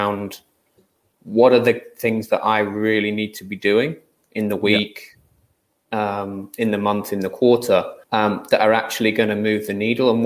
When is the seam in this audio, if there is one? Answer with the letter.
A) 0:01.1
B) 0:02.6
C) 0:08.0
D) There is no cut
C